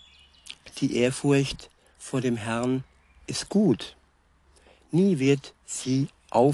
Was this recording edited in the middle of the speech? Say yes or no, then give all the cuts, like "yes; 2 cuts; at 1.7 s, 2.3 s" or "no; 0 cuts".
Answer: no; 0 cuts